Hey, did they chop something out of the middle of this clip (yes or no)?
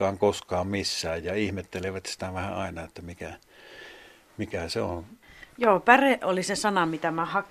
no